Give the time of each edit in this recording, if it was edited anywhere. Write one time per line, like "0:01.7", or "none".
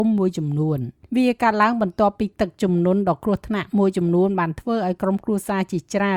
0:01.1